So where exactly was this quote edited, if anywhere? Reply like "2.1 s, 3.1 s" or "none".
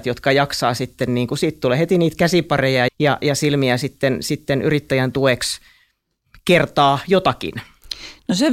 2.9 s